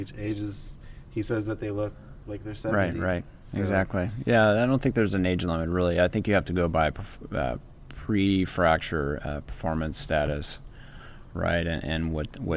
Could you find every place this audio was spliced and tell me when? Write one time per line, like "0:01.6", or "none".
none